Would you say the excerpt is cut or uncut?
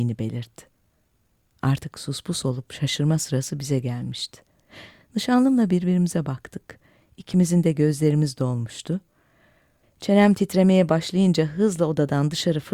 cut